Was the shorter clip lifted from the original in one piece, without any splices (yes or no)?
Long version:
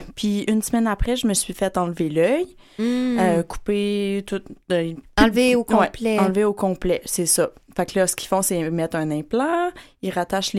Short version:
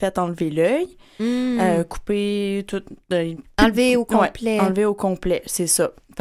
yes